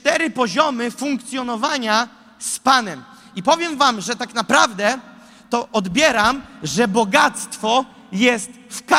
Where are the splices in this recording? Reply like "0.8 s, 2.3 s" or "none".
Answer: none